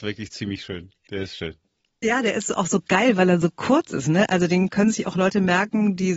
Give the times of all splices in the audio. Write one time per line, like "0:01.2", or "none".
none